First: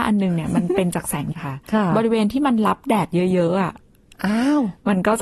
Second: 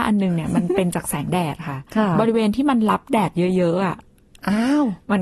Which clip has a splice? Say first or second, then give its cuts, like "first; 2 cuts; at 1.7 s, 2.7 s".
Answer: first; 1 cut; at 1.3 s